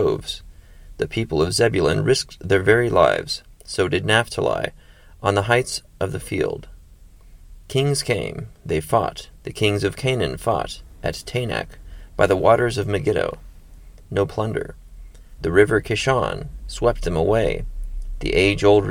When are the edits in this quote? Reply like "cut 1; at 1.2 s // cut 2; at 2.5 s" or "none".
cut 1; at 9.4 s // cut 2; at 14.0 s // cut 3; at 15.4 s